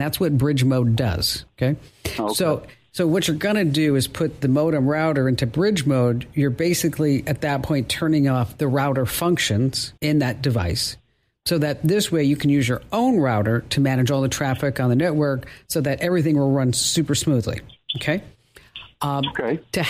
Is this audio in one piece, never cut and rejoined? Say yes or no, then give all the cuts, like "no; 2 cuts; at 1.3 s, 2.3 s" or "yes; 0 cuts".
no; 1 cut; at 10.0 s